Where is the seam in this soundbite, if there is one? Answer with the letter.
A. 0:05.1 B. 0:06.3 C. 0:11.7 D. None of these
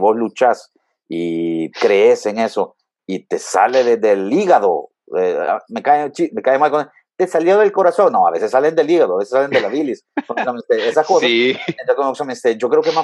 B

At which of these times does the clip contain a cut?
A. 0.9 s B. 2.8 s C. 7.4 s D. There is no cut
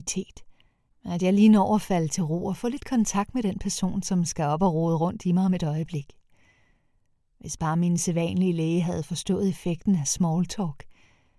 D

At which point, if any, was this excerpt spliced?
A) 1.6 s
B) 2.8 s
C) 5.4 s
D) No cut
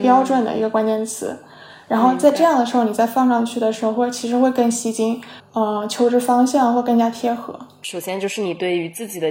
C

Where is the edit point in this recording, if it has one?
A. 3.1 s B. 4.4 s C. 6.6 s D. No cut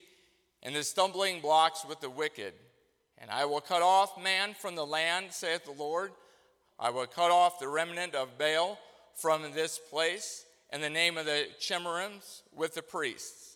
C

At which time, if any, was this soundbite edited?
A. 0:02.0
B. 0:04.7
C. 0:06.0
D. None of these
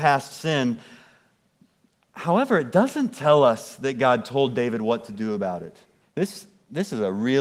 C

